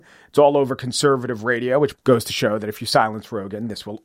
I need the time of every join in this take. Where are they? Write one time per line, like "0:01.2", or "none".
0:01.9